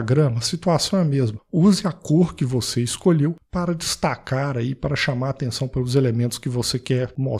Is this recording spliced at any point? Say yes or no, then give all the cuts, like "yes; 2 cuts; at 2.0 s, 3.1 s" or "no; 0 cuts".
no; 0 cuts